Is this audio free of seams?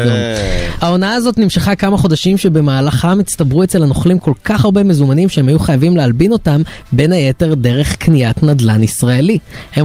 yes; 0 cuts

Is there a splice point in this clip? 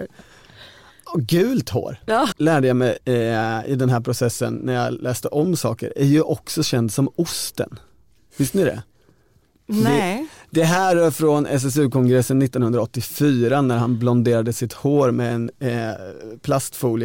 yes; 1 cut; at 2.3 s

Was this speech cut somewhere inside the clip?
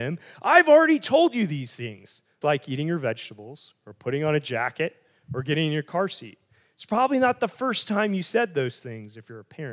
yes; 1 cut; at 2.4 s

